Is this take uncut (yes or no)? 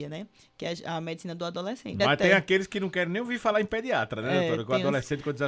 no